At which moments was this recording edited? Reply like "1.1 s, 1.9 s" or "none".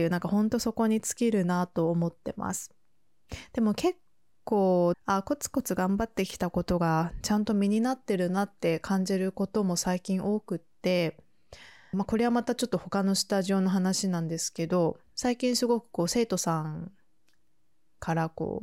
4.9 s, 11.9 s, 15.1 s